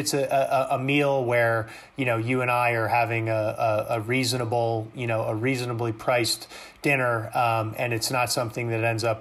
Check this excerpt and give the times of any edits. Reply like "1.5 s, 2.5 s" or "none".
none